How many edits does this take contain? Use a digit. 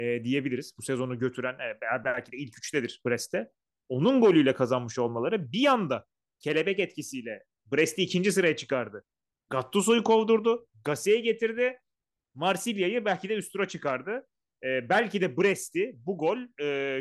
0